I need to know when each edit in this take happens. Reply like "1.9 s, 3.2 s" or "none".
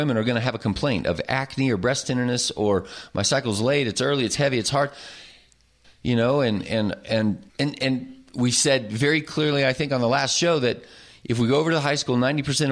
5.8 s, 7.5 s

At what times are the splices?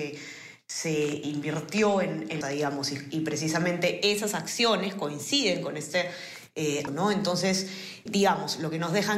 2.4 s, 6.9 s, 8.1 s

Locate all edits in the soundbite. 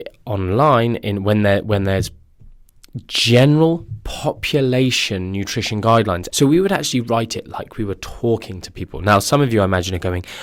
6.3 s

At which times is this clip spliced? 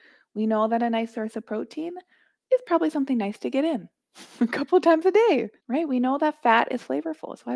5.6 s

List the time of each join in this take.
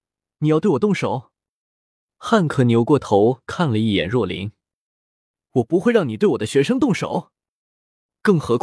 none

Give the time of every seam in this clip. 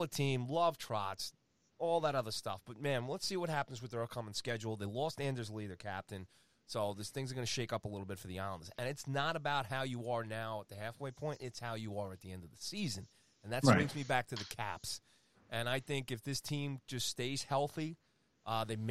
none

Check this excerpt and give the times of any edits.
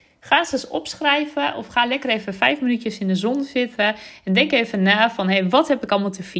none

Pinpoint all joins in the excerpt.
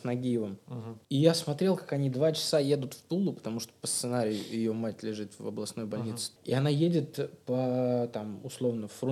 1.0 s, 6.4 s

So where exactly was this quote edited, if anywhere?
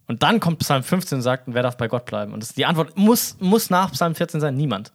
none

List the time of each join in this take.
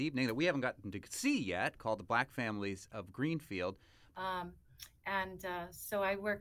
4.1 s

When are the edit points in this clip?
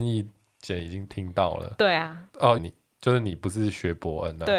2.6 s

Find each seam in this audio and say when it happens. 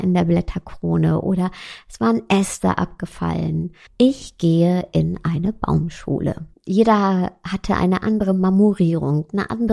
3.9 s, 6.5 s

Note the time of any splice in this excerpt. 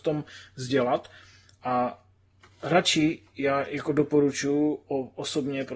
none

